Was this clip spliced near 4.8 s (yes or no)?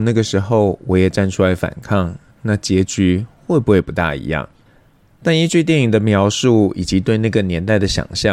no